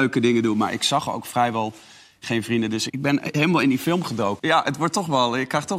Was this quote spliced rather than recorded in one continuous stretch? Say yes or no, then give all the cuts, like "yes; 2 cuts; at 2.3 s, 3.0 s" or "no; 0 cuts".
yes; 2 cuts; at 2.9 s, 4.4 s